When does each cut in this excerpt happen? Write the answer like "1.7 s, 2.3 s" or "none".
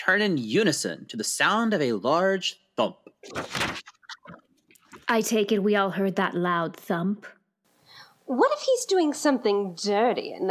none